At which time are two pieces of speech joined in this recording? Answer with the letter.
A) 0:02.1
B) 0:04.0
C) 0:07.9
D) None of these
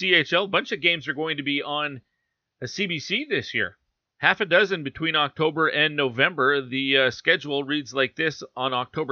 D